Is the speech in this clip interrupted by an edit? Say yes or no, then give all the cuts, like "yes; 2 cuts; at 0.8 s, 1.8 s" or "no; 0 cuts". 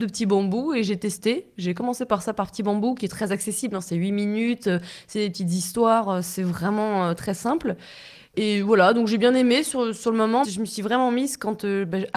yes; 1 cut; at 10.4 s